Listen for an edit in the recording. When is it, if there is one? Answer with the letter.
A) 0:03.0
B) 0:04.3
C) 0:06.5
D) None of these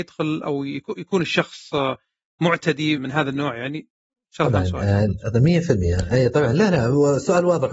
A